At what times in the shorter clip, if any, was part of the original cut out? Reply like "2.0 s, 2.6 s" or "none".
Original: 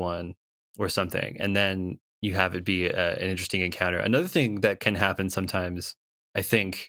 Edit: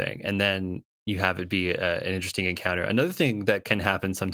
none